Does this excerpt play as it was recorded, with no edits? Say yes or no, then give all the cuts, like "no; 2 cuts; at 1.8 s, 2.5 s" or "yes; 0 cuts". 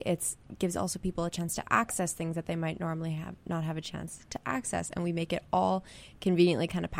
yes; 0 cuts